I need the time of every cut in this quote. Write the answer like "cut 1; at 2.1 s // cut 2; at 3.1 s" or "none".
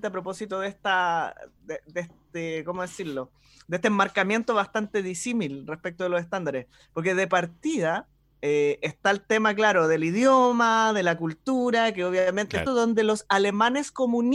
cut 1; at 12.7 s